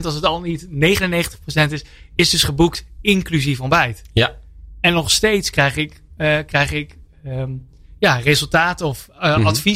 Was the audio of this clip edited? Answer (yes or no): no